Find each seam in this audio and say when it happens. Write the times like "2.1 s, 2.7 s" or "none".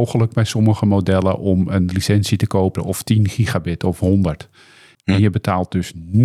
2.8 s, 4.9 s